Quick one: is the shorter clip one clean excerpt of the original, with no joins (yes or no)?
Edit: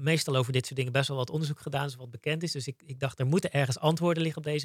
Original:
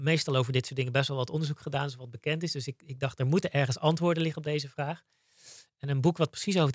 yes